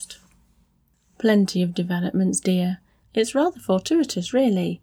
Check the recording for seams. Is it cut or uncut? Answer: cut